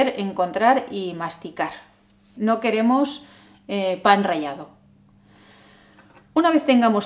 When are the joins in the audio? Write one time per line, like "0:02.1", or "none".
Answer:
0:02.3